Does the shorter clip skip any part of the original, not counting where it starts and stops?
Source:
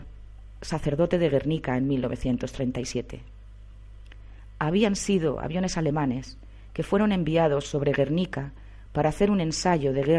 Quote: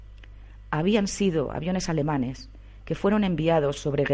no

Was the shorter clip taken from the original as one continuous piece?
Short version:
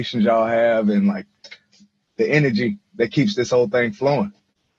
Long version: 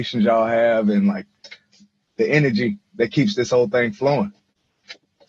yes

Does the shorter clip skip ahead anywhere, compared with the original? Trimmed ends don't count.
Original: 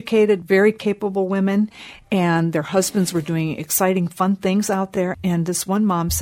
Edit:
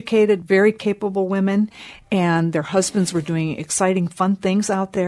no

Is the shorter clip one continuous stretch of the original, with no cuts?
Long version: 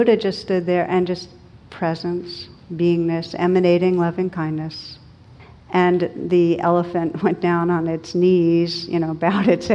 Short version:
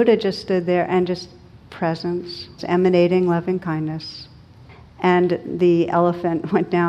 no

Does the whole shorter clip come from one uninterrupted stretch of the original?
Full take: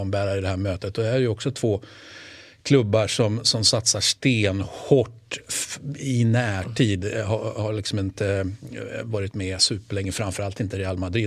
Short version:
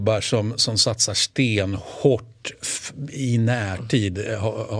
yes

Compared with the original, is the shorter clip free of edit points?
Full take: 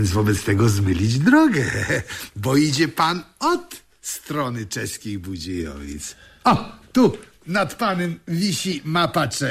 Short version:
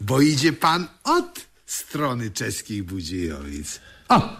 yes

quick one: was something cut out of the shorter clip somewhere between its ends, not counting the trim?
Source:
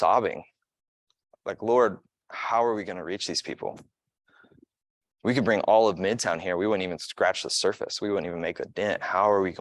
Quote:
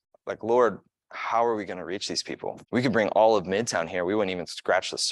yes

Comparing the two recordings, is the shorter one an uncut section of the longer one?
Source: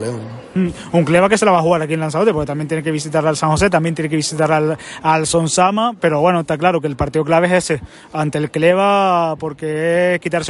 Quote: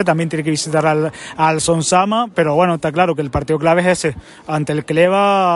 yes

